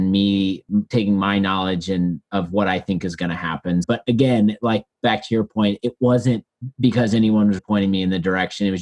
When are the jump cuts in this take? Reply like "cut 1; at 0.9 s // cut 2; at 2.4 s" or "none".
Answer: cut 1; at 3.8 s // cut 2; at 7.6 s